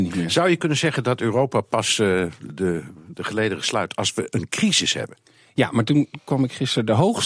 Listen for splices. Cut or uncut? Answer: uncut